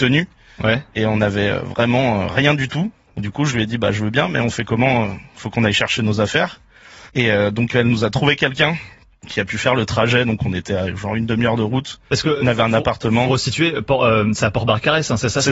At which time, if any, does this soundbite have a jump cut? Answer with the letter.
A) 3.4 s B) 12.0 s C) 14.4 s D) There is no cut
D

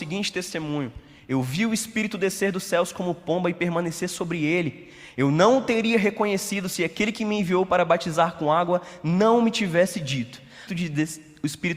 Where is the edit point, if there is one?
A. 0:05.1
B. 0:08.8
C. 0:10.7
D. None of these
C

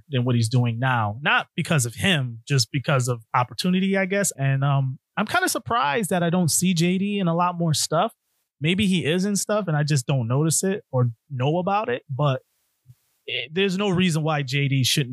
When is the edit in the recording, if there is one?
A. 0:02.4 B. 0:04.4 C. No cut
B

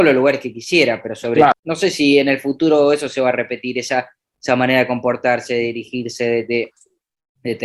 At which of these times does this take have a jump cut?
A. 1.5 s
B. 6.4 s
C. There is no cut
A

